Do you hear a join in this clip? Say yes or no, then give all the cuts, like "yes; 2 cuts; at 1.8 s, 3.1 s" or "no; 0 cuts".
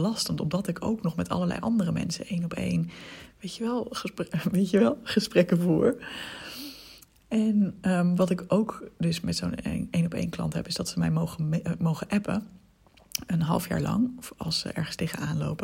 no; 0 cuts